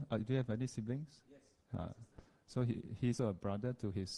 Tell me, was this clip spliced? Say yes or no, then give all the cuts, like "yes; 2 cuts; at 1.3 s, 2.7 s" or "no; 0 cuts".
yes; 1 cut; at 3.2 s